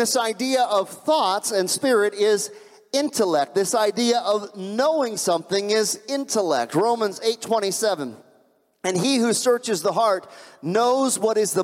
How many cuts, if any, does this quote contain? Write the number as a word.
zero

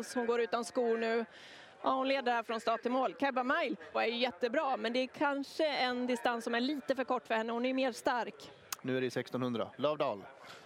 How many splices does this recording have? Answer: two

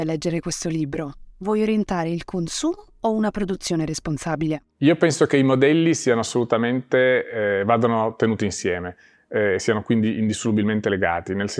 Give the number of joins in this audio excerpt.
one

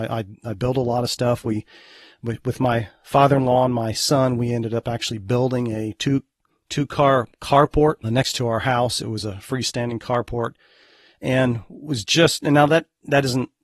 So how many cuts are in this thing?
one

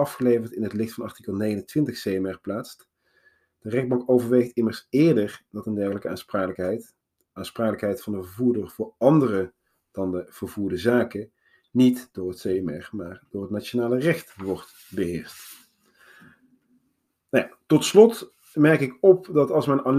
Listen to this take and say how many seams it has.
zero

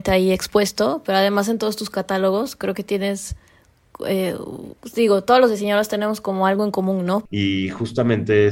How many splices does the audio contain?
two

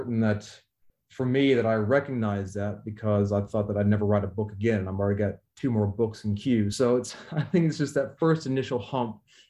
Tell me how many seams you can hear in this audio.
zero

